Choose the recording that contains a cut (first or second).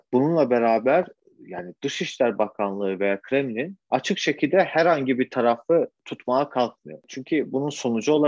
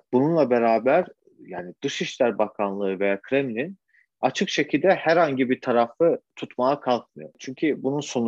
first